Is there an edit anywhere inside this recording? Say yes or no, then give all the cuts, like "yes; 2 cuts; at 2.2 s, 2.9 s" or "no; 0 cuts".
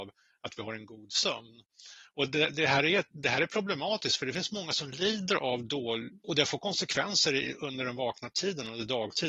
yes; 1 cut; at 6.2 s